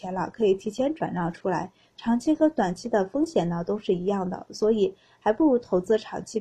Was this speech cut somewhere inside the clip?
no; 0 cuts

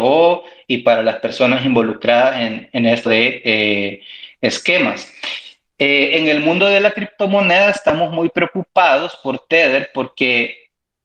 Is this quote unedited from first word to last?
no; 1 cut; at 3.1 s

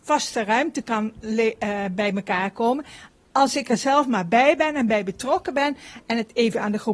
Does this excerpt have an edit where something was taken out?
no; 0 cuts

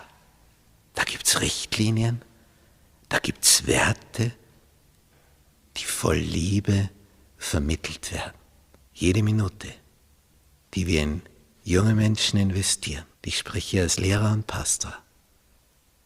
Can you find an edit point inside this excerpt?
yes; 2 cuts; at 8.8 s, 13.1 s

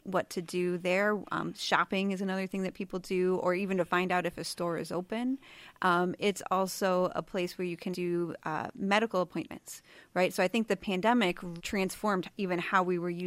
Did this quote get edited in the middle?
yes; 2 cuts; at 7.9 s, 11.6 s

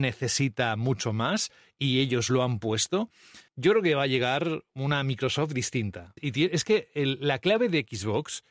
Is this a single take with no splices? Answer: no; 2 cuts; at 3.5 s, 6.2 s

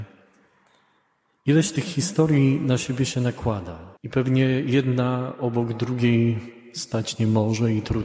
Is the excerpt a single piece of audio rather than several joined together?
no; 1 cut; at 4.0 s

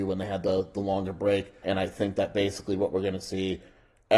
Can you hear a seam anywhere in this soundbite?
yes; 1 cut; at 1.6 s

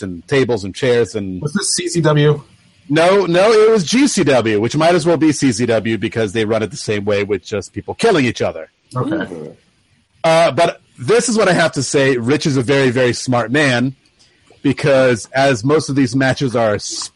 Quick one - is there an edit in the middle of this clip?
no; 0 cuts

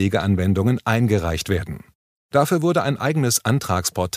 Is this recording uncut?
yes; 0 cuts

